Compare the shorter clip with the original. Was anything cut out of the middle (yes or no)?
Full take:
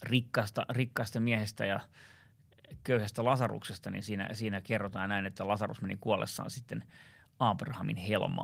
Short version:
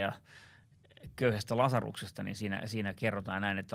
no